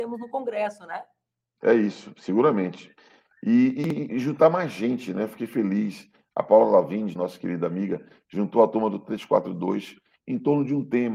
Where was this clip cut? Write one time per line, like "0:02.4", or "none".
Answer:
0:04.1
0:07.2